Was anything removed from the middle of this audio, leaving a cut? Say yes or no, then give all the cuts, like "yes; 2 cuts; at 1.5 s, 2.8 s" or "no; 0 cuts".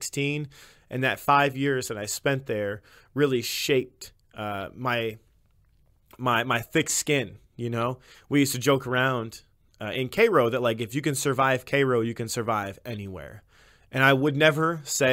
no; 0 cuts